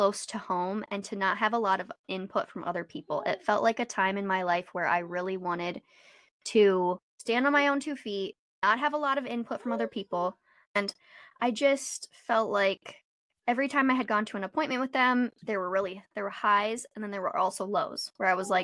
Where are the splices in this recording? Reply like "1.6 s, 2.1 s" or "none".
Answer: 10.6 s